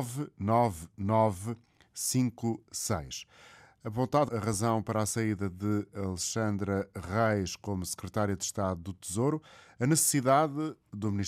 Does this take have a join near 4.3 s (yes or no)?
yes